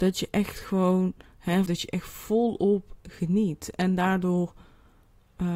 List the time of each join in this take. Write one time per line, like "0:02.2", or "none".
0:01.7